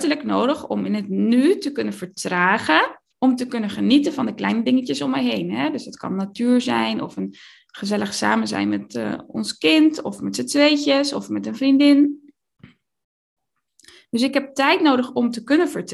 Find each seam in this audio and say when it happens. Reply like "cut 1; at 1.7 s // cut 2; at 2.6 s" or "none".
cut 1; at 3.1 s